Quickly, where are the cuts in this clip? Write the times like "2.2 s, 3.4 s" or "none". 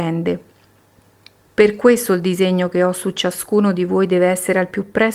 1.4 s